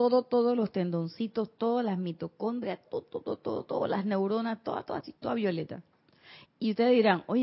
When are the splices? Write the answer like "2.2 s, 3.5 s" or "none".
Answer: 2.8 s, 5.2 s, 6.5 s